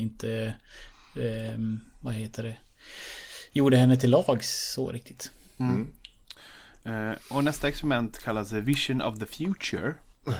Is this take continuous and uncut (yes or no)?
yes